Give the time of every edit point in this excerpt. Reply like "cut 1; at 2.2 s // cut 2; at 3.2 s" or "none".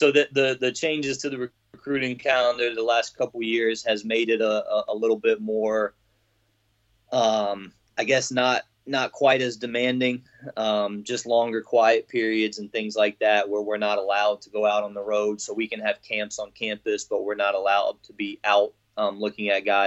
none